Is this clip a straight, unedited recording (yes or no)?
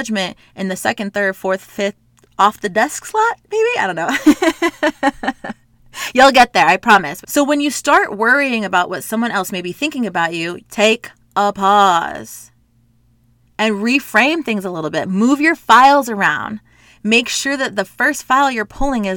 no